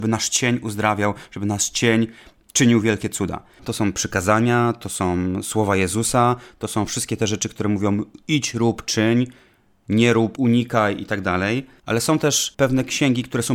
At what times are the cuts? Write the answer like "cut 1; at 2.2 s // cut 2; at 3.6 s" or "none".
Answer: cut 1; at 3.6 s